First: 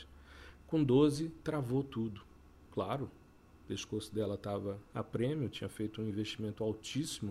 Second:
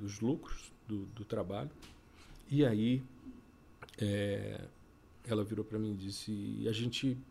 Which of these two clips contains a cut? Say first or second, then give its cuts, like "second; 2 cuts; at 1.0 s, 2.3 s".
first; 1 cut; at 2.7 s